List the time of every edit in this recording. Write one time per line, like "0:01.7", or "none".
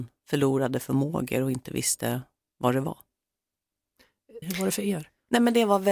0:04.4